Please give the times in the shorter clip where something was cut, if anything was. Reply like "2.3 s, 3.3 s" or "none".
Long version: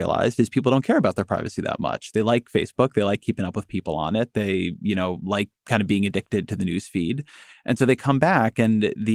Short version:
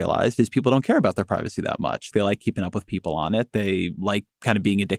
2.1 s, 4.0 s

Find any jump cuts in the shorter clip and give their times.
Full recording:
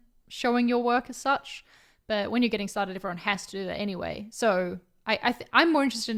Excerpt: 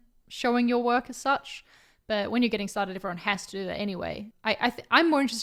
4.3 s

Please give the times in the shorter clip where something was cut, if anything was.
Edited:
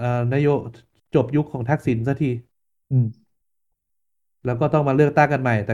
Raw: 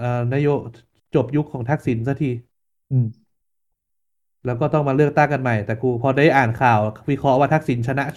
none

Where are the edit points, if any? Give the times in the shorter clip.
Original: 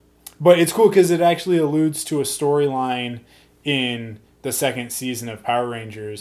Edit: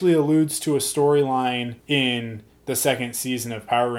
1.8 s

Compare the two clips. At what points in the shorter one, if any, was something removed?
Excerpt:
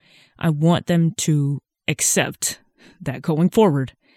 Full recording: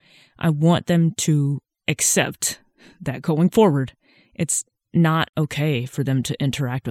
none

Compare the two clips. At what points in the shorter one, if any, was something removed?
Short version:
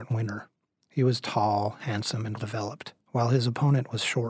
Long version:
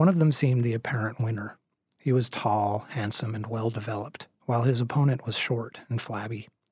2.4 s

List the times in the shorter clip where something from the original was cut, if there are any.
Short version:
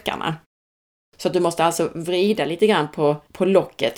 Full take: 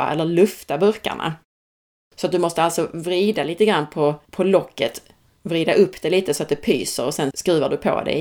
none

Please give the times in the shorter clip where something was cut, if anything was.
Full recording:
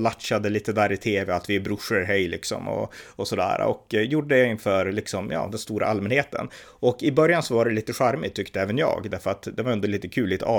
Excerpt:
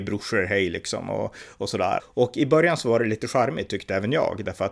2.0 s

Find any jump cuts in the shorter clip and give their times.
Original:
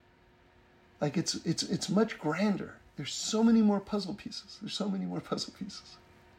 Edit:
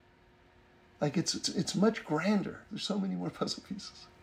1.4 s, 2.7 s

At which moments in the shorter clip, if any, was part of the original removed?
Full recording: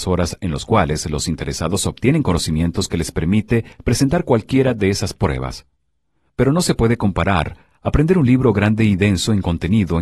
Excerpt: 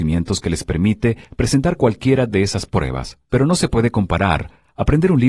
3.2 s

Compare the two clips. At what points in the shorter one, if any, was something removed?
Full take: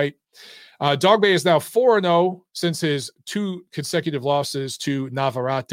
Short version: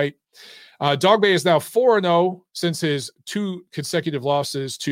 none

